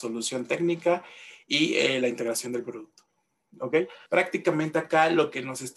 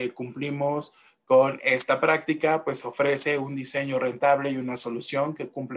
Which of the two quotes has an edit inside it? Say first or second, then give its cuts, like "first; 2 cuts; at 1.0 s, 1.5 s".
first; 1 cut; at 4.1 s